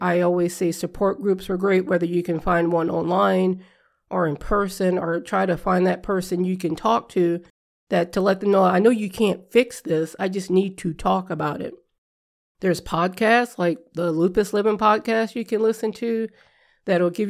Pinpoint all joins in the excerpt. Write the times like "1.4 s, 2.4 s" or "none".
none

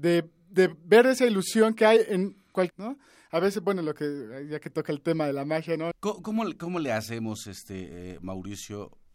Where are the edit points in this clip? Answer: 2.7 s, 5.9 s

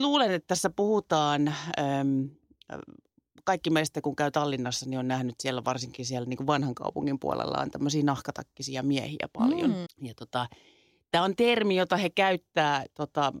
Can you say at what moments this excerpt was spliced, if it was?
9.9 s

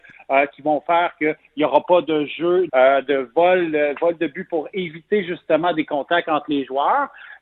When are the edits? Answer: 2.7 s

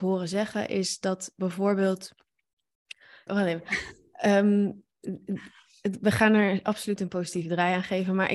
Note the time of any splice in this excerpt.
3.3 s

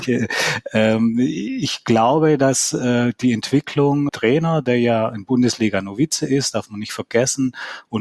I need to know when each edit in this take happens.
4.1 s

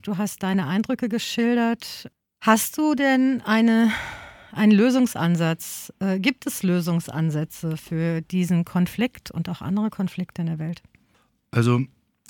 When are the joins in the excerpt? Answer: none

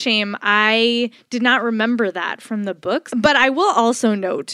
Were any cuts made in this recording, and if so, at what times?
3.1 s

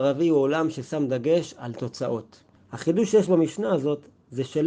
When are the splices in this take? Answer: 2.6 s

